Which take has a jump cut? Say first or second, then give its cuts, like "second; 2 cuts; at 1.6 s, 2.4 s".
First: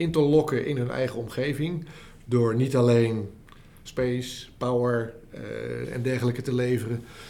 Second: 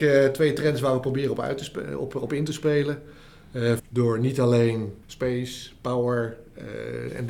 second; 2 cuts; at 3.8 s, 5.0 s